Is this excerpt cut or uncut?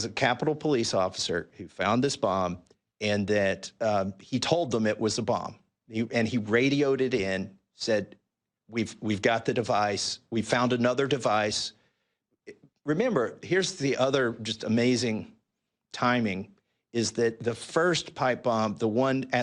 uncut